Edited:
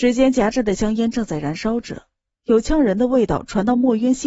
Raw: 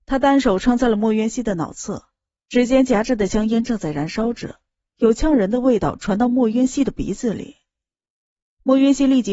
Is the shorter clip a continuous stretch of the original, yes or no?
yes